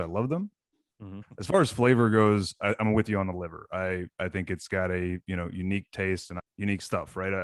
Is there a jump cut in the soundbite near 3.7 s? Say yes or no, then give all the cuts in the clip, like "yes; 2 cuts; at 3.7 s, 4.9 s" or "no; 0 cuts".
no; 2 cuts; at 1.2 s, 6.4 s